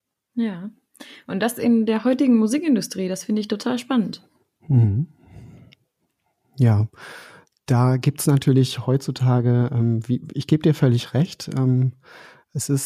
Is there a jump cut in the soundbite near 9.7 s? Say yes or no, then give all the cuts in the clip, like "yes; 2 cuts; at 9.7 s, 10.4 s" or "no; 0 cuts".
no; 0 cuts